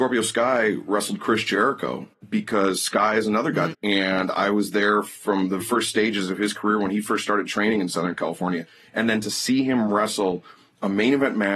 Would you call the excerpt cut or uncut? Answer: cut